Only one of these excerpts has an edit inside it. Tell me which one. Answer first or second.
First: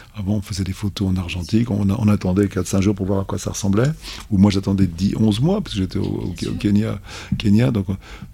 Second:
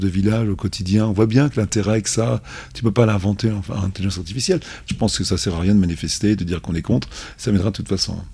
second